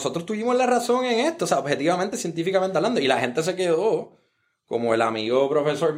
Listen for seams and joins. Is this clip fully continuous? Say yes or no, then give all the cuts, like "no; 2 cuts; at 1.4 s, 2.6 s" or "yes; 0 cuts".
yes; 0 cuts